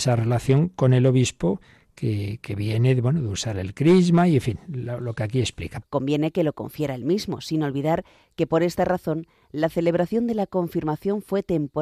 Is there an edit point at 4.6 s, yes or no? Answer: no